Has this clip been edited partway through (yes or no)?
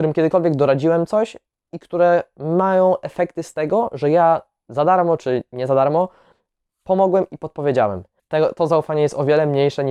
yes